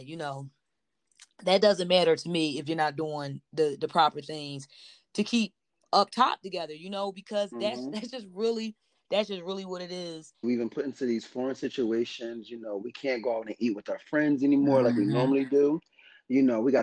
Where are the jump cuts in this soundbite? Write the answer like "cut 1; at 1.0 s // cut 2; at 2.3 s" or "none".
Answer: cut 1; at 10.4 s

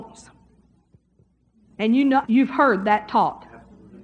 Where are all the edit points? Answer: cut 1; at 2.2 s

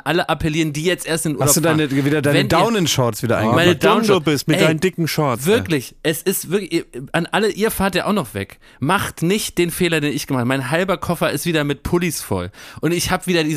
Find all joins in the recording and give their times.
none

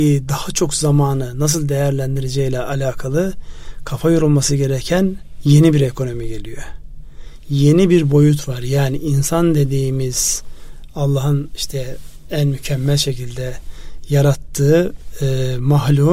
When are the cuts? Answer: none

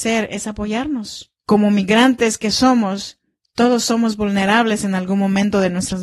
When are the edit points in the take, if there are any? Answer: cut 1; at 1.4 s

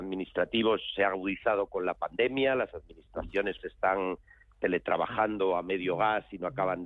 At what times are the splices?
cut 1; at 3.6 s

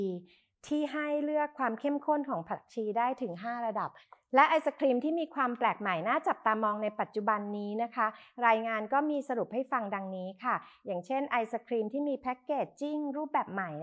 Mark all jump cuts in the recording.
none

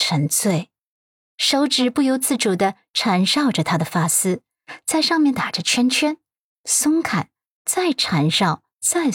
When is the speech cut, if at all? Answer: cut 1; at 6.5 s

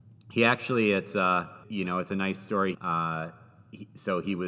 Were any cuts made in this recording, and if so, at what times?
cut 1; at 1.6 s // cut 2; at 2.7 s

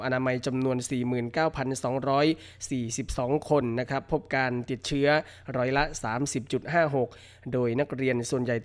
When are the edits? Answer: none

